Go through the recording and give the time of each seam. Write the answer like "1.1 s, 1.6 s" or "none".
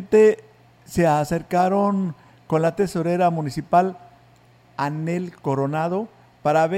none